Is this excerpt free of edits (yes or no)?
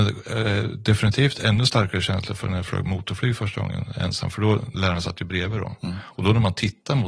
no